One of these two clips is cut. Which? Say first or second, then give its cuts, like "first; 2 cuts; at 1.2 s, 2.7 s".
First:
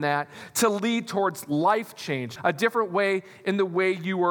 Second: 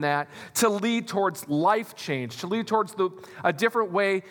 first; 1 cut; at 2.4 s